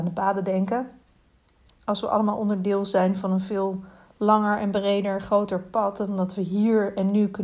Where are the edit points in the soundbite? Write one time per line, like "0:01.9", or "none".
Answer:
0:01.7